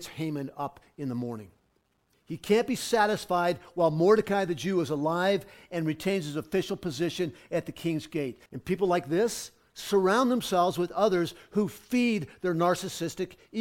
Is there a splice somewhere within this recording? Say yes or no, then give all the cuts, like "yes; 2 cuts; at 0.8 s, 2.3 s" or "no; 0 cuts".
yes; 2 cuts; at 2.1 s, 8.5 s